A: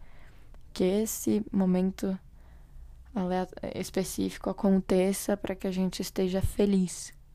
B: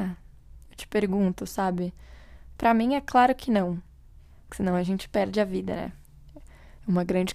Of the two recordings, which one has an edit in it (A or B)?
B